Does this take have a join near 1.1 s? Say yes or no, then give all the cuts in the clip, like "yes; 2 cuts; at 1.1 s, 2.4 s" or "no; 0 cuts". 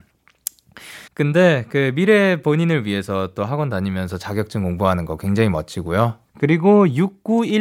yes; 2 cuts; at 1.1 s, 6.3 s